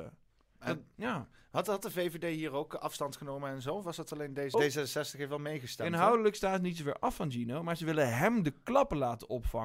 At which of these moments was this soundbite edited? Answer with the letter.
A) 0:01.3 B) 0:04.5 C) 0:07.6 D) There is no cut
B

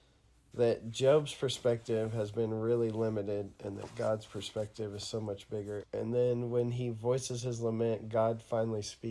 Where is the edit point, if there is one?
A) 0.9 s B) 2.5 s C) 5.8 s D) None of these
C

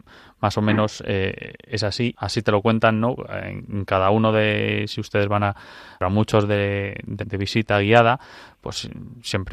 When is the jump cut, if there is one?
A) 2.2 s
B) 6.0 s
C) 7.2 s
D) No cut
C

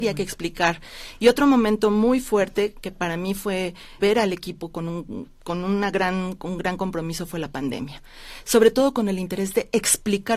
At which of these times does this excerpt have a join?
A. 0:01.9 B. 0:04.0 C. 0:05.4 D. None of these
B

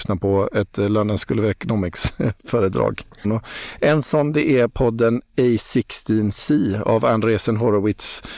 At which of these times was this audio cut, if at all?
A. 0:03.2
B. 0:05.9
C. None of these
A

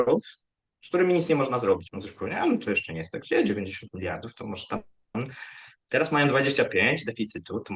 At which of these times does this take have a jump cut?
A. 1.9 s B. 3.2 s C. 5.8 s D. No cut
A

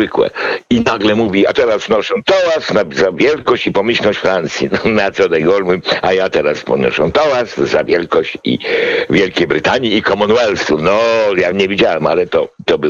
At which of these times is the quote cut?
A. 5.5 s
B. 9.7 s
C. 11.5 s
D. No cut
C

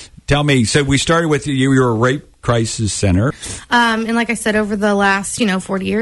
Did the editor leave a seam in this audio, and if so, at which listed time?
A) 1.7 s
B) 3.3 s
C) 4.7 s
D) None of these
B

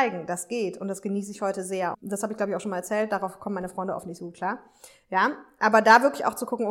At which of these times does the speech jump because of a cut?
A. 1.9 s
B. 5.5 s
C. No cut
A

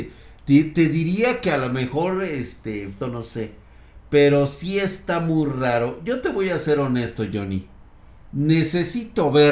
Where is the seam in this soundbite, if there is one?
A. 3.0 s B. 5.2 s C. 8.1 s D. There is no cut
A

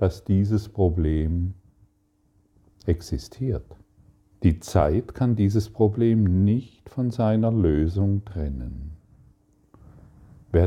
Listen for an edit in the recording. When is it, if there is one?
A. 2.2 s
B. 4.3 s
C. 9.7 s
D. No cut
B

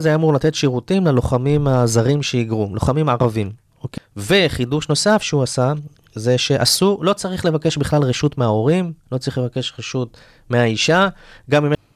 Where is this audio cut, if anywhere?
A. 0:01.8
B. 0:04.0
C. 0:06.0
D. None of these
B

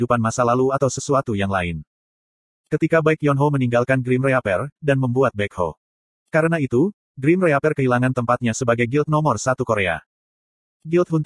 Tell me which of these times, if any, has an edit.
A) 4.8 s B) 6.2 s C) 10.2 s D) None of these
A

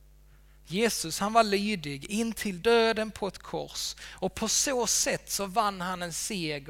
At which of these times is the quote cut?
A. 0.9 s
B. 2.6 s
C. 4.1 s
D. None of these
B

